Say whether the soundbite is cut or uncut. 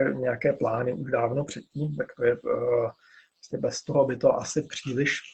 uncut